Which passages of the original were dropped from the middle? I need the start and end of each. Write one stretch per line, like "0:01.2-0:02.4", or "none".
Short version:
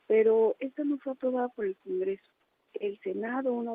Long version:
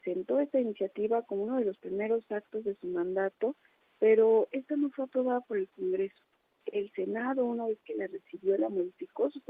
none